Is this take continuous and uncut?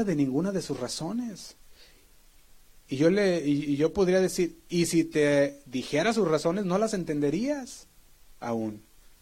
yes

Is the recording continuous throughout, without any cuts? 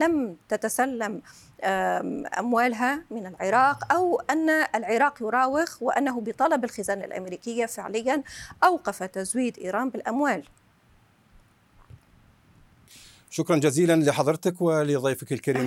yes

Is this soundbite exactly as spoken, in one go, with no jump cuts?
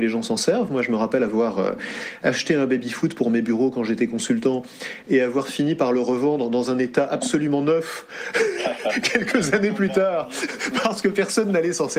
yes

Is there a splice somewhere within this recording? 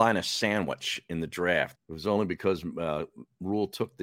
yes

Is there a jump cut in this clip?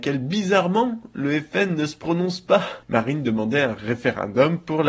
yes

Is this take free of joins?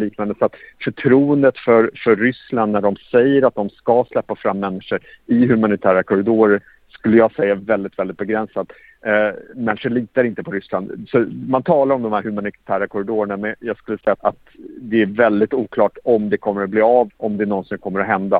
no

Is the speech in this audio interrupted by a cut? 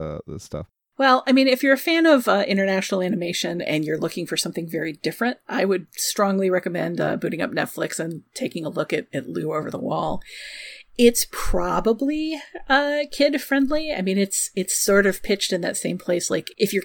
no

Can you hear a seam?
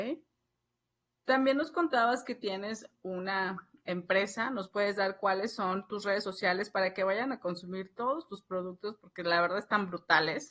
no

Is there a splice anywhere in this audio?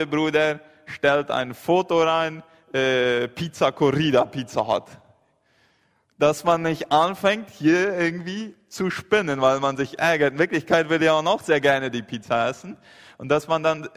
no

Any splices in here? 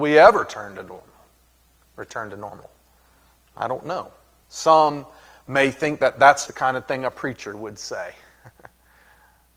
yes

